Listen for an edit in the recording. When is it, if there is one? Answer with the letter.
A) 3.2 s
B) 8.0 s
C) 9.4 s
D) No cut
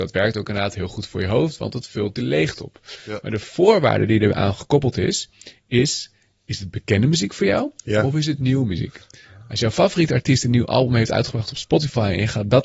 D